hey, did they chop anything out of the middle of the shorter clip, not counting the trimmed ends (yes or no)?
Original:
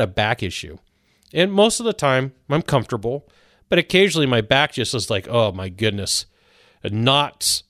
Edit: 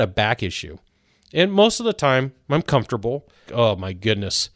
yes